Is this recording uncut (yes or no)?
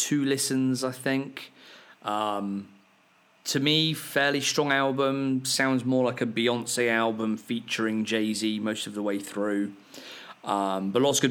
yes